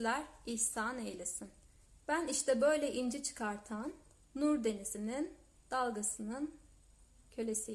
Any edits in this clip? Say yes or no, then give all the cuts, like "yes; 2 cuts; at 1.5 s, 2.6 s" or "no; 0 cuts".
yes; 1 cut; at 2.0 s